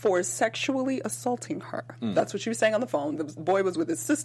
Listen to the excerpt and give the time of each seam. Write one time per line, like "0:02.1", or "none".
0:03.2